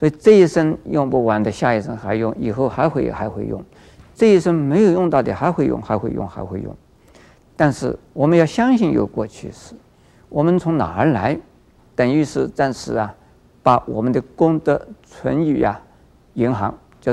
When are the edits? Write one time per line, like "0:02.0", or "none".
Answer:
0:08.1
0:11.8